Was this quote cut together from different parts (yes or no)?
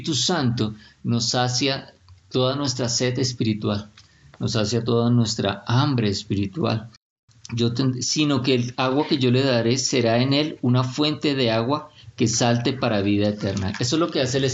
no